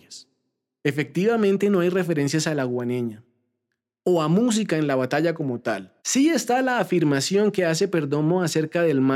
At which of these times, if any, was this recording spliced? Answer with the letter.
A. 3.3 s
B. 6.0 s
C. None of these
B